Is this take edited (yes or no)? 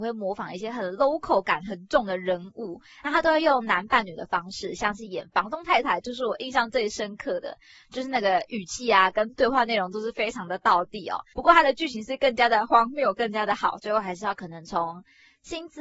yes